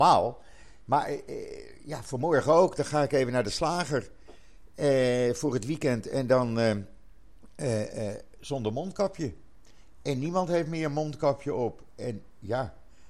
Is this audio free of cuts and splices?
yes; 0 cuts

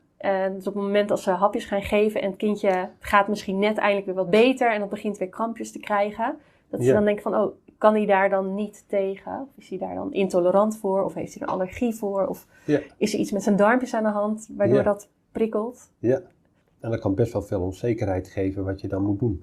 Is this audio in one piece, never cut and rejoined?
yes; 0 cuts

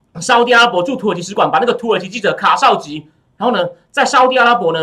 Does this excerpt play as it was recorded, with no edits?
no; 1 cut; at 3.4 s

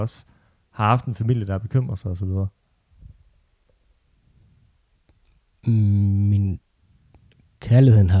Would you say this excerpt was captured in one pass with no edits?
yes; 0 cuts

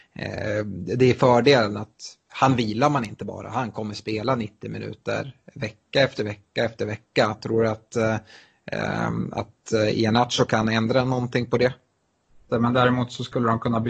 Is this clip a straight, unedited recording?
no; 1 cut; at 12.5 s

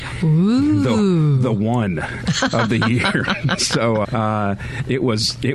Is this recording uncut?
no; 1 cut; at 4.0 s

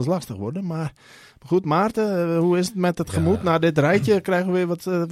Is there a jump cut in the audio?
no; 0 cuts

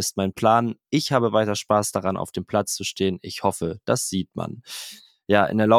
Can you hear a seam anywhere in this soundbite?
no; 0 cuts

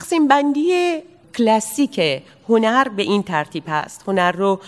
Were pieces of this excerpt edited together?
no; 0 cuts

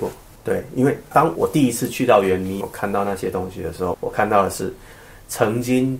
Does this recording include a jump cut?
yes; 3 cuts; at 1.4 s, 2.6 s, 3.9 s

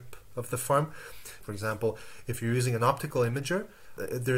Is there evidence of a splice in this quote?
yes; 1 cut; at 1.4 s

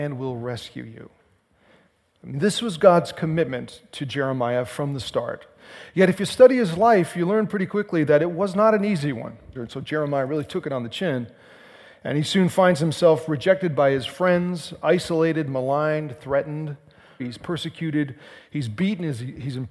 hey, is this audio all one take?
no; 2 cuts; at 9.5 s, 17.2 s

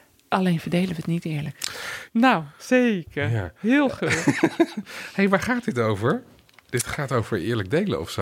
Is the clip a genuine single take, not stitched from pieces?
no; 1 cut; at 2.1 s

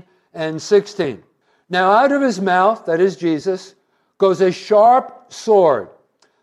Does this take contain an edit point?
no; 0 cuts

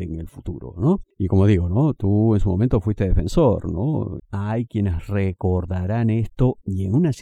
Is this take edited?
yes; 1 cut; at 4.2 s

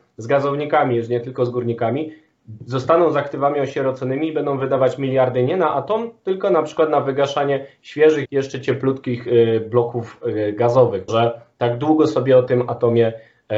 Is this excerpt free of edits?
no; 2 cuts; at 8.2 s, 11.1 s

